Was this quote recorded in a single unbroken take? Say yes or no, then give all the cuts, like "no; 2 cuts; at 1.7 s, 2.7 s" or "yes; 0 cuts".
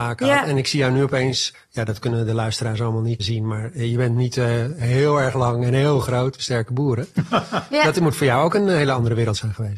no; 3 cuts; at 1.5 s, 3.2 s, 6.4 s